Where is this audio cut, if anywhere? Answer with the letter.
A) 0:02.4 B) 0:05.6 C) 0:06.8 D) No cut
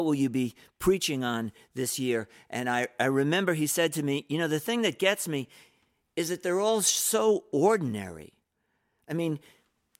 D